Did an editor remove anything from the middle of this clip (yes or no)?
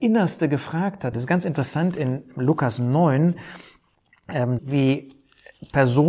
yes